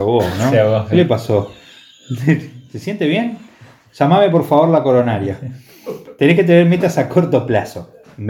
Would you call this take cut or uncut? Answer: uncut